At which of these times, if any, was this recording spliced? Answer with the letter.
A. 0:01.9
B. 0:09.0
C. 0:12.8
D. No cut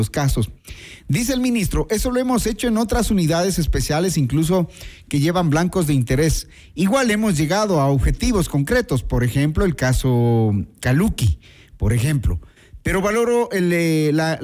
D